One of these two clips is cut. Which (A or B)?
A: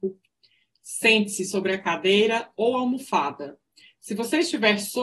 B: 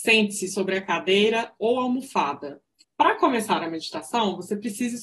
B